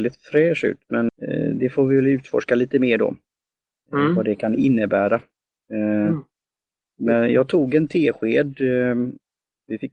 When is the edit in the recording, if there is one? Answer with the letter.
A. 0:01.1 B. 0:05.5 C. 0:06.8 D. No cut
A